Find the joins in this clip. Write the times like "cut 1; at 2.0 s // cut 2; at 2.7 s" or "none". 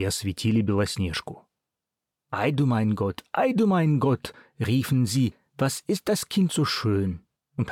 none